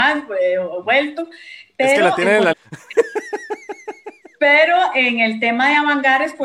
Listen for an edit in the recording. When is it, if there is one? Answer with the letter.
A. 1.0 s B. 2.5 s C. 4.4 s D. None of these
B